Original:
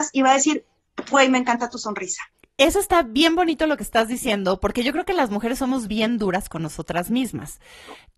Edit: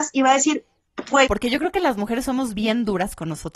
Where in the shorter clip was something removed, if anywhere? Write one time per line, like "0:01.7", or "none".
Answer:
0:01.3